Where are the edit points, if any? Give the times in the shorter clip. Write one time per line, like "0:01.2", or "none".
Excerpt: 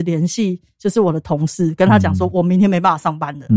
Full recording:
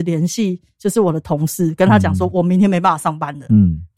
none